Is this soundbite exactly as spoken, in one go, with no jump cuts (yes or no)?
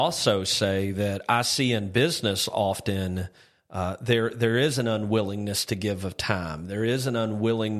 yes